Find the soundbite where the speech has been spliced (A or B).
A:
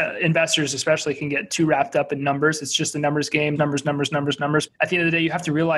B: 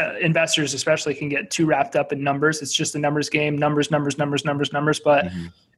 A